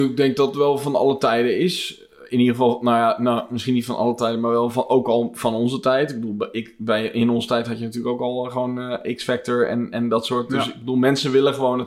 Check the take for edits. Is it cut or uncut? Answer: uncut